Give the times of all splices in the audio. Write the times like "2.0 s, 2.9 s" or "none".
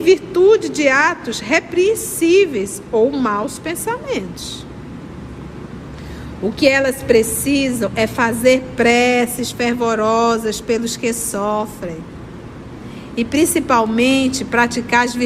none